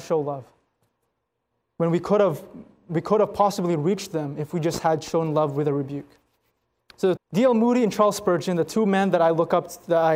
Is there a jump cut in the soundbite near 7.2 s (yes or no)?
yes